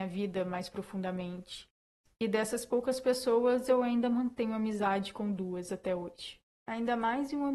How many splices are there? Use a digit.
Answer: 1